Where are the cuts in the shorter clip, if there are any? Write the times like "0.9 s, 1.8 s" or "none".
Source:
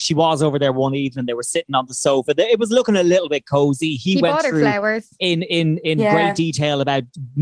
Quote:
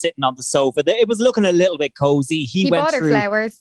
none